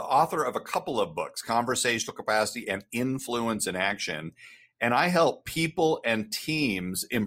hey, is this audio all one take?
yes; 0 cuts

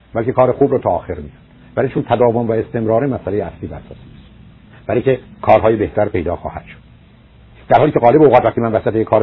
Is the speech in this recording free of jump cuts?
yes; 0 cuts

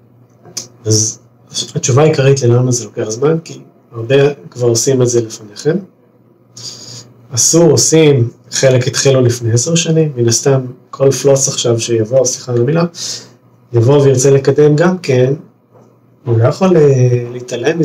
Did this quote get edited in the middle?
no; 0 cuts

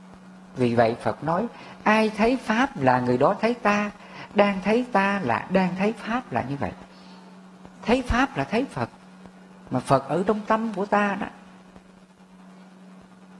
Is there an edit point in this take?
yes; 1 cut; at 7.8 s

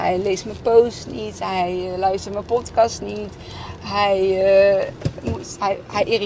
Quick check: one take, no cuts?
yes; 0 cuts

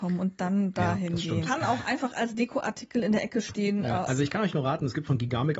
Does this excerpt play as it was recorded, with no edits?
no; 2 cuts; at 1.5 s, 4.1 s

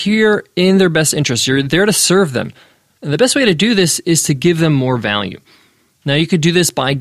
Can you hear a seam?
no; 0 cuts

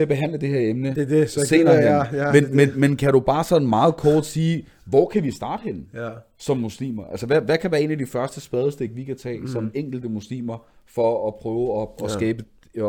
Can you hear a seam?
no; 0 cuts

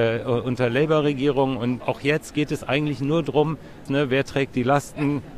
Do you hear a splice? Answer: yes; 2 cuts; at 1.8 s, 3.9 s

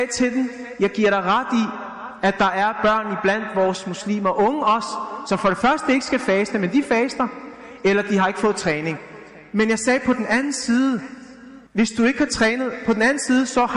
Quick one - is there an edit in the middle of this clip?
yes; 1 cut; at 11.7 s

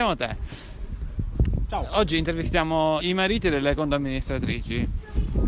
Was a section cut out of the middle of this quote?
yes; 1 cut; at 3.0 s

